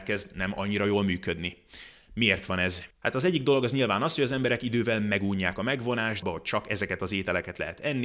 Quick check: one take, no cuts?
no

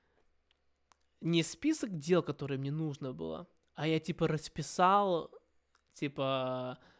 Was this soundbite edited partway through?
no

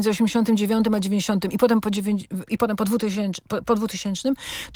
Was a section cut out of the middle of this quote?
yes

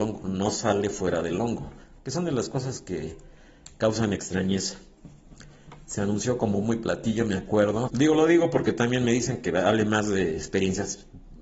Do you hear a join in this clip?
yes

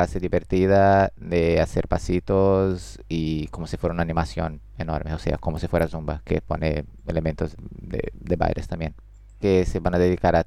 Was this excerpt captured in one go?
no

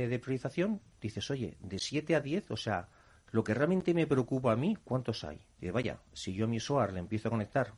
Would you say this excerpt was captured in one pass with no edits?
no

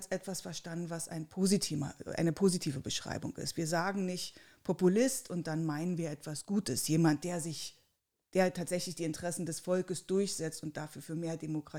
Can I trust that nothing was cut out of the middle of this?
yes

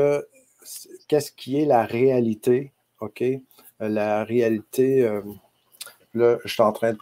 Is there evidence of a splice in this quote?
no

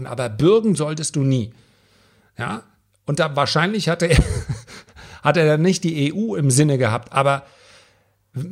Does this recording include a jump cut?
no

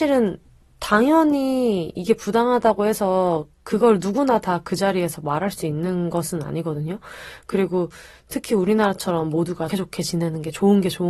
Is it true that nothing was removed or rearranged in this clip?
no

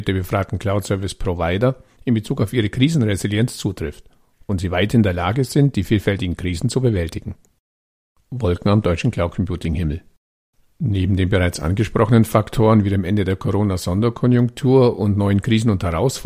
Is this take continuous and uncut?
no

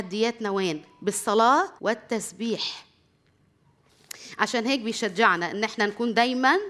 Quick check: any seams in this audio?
yes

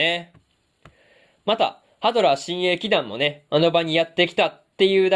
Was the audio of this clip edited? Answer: no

